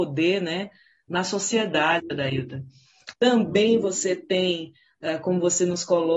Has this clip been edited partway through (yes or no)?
yes